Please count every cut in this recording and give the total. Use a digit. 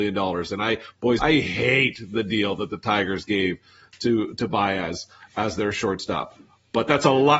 1